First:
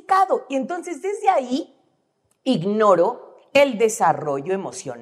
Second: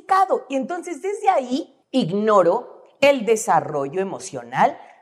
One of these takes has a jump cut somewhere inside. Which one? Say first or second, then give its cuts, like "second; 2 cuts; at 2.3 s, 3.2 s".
second; 1 cut; at 1.8 s